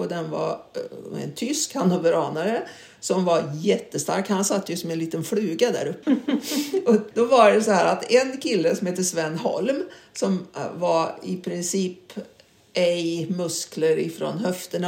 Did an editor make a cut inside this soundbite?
yes; 2 cuts; at 6.0 s, 7.1 s

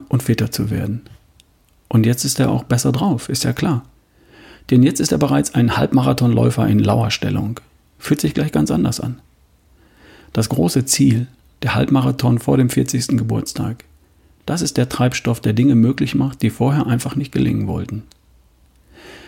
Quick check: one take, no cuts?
yes; 0 cuts

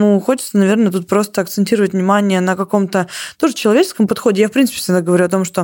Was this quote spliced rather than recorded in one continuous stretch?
no; 0 cuts

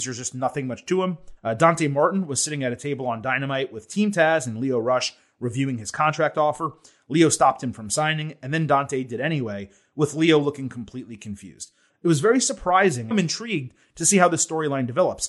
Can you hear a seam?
yes; 3 cuts; at 1.4 s, 11.9 s, 13.1 s

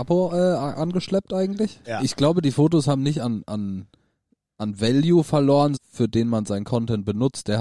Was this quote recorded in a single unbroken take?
no; 2 cuts; at 1.8 s, 5.8 s

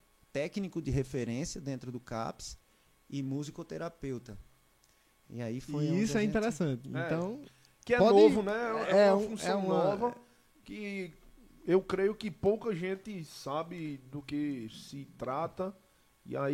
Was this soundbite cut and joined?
no; 0 cuts

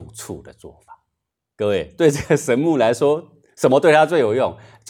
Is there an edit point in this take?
no; 0 cuts

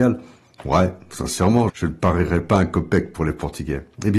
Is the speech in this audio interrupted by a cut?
yes; 1 cut; at 1.7 s

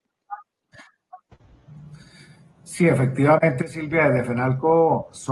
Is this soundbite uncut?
yes; 0 cuts

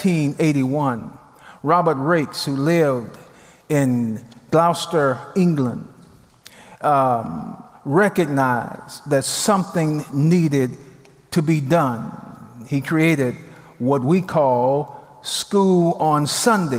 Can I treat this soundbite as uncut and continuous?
yes; 0 cuts

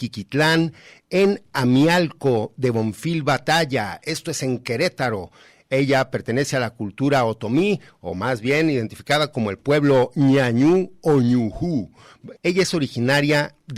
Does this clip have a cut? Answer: yes; 1 cut; at 12.4 s

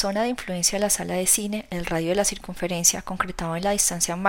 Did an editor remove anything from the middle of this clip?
no; 0 cuts

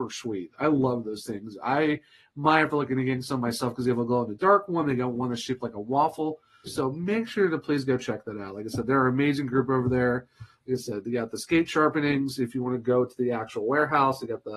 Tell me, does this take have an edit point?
yes; 1 cut; at 6.7 s

